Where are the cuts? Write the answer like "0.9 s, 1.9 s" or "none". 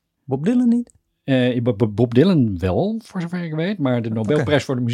none